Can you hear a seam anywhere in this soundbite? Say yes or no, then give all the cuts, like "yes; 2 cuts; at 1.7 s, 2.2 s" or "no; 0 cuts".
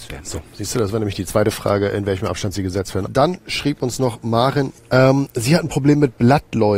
yes; 1 cut; at 3.1 s